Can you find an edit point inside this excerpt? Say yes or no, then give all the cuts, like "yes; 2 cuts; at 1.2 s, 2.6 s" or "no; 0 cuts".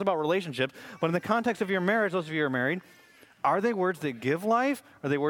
no; 0 cuts